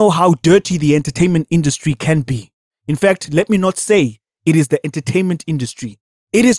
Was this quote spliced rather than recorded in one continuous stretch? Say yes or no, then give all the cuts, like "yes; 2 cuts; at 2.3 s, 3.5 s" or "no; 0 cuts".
no; 0 cuts